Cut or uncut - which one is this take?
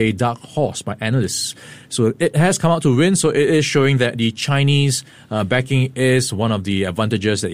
uncut